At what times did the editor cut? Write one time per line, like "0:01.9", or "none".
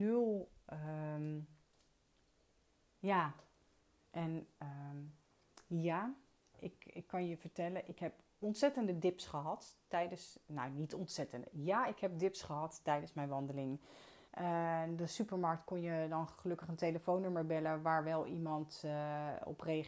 0:04.1
0:14.3

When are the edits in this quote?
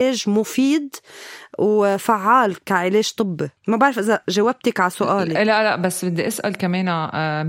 0:03.6

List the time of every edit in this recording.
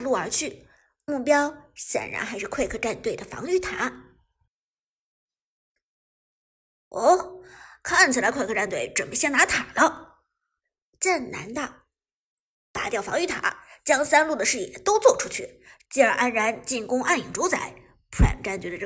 none

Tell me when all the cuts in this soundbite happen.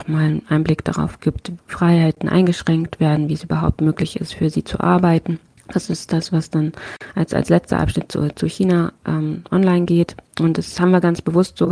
0:01.6

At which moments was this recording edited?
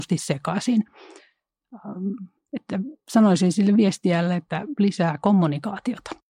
0:02.4

